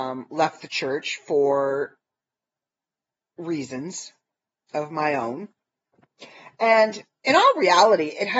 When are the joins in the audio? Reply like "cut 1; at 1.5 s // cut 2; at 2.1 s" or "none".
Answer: none